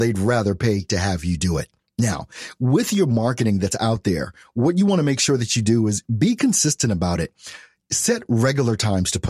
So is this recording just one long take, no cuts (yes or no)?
yes